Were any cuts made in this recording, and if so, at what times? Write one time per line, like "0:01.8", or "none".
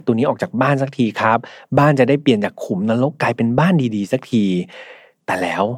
none